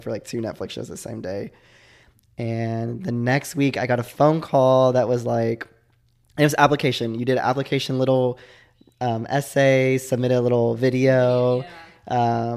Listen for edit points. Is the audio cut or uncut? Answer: uncut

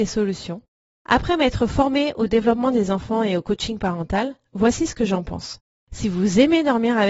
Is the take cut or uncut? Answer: cut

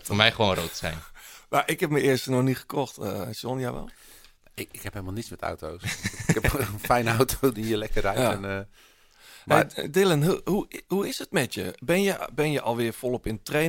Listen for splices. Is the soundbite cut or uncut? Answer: uncut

